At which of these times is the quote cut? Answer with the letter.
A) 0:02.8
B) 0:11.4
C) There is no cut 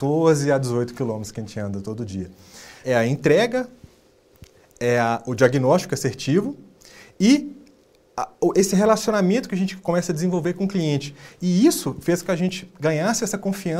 A